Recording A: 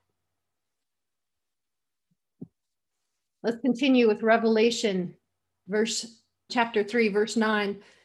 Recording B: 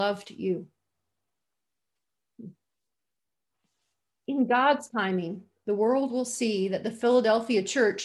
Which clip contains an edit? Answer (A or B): A